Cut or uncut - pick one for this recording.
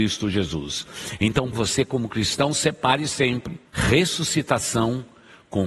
cut